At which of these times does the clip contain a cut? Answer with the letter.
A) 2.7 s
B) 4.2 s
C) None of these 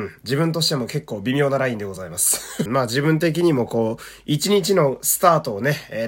A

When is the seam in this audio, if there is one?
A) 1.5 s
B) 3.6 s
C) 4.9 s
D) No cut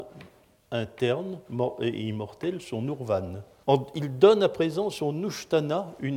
B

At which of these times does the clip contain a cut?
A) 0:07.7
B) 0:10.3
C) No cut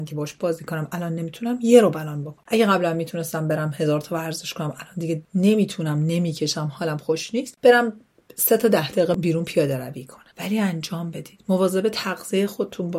B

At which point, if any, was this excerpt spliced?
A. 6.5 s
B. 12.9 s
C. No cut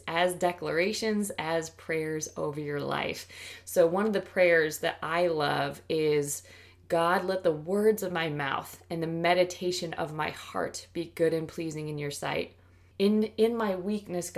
B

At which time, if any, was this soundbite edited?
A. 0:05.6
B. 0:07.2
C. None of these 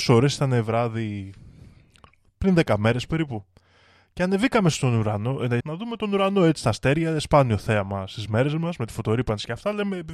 A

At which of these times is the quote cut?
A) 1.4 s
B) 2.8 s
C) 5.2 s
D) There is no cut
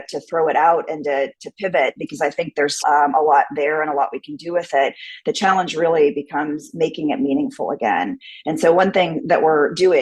B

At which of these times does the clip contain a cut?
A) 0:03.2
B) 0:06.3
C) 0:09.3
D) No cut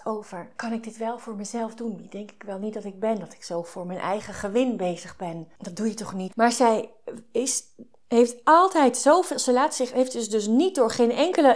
B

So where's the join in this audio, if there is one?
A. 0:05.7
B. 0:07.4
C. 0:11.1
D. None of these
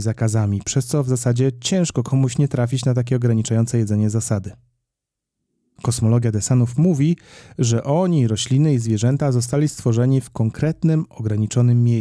D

